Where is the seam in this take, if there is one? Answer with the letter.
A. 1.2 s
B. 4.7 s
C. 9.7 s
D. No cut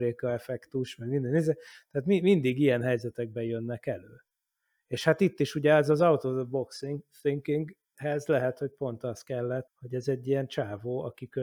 C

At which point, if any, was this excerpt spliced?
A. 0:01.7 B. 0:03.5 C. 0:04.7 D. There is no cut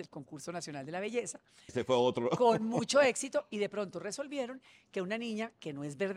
A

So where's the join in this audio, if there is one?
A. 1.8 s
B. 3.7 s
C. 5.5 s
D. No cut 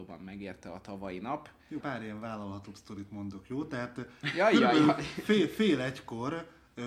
A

